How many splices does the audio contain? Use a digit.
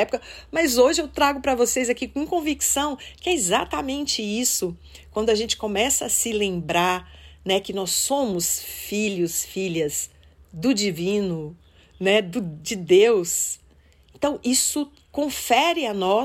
0